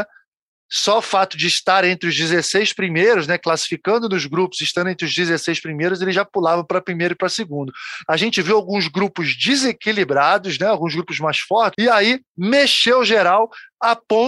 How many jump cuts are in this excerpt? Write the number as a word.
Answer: two